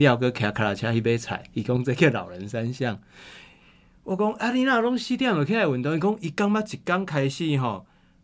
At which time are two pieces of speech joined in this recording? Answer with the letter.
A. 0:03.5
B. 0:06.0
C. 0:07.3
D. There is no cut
D